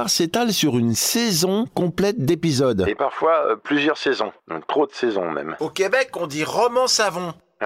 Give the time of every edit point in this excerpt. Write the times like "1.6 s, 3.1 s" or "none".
4.4 s, 5.6 s